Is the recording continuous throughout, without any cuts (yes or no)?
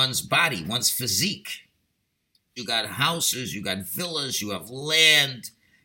no